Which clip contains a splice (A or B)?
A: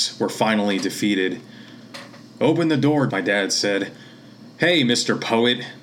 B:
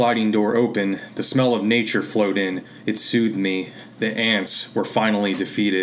A